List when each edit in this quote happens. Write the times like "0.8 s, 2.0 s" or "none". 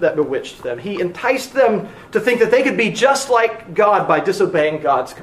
none